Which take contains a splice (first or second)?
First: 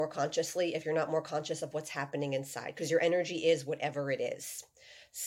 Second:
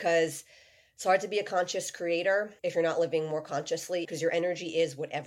second